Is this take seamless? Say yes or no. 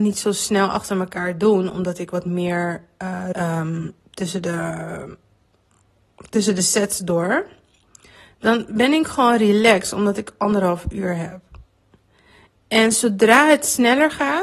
no